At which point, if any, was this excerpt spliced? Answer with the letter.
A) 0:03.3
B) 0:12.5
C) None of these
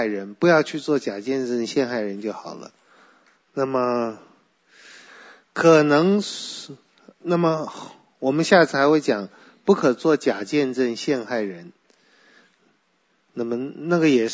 A